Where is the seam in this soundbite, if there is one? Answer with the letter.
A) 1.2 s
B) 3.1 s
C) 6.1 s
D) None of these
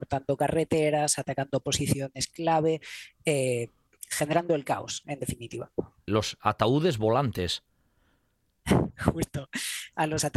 C